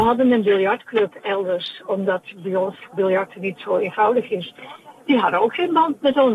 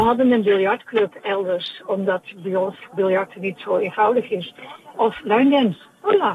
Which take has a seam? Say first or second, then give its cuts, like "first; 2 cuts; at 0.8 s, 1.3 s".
second; 1 cut; at 4.9 s